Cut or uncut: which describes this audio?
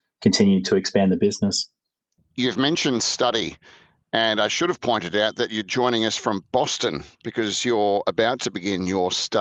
uncut